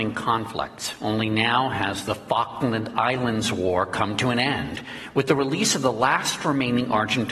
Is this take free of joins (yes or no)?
yes